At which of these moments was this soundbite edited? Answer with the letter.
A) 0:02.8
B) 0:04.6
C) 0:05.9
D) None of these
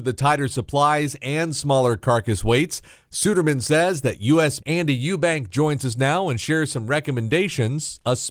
B